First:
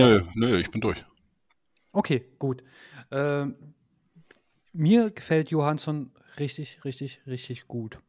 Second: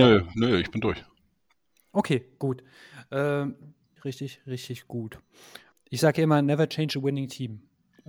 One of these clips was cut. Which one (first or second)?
second